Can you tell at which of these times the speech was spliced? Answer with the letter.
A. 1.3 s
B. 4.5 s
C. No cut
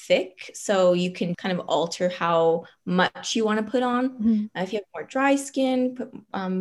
A